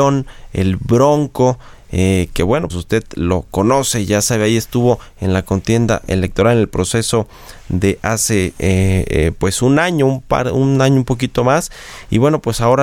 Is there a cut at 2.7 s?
yes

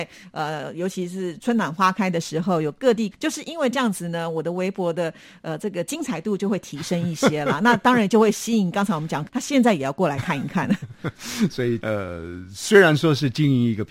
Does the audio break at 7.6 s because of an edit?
no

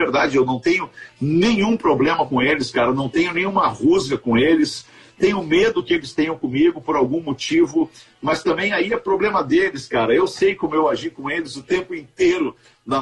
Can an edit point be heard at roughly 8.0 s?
no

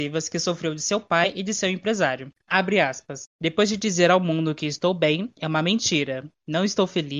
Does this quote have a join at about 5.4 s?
no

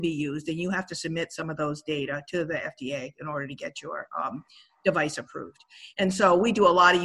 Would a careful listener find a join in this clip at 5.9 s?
no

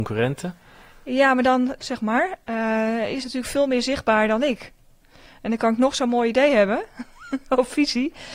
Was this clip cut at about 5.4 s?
no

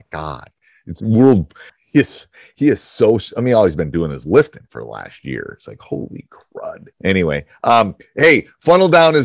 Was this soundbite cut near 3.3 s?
no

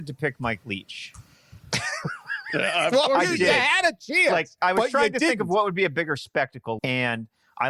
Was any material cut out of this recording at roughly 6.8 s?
yes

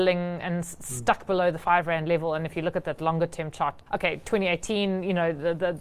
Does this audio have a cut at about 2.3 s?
no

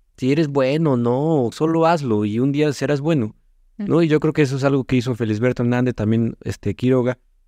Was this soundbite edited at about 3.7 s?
no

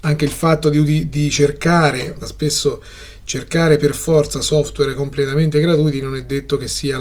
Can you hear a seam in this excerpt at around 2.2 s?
yes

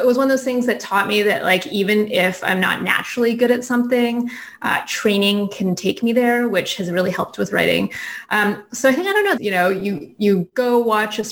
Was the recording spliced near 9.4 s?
yes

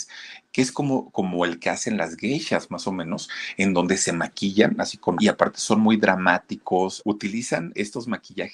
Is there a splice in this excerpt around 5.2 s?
yes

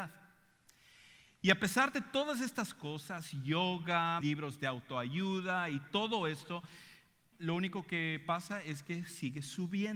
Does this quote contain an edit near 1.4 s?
no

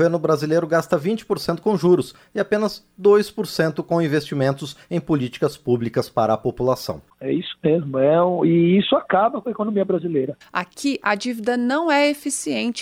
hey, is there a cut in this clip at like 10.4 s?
yes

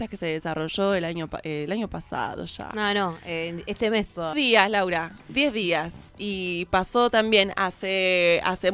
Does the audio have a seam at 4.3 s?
yes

